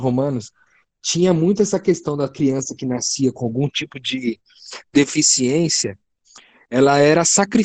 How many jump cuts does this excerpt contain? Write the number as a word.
zero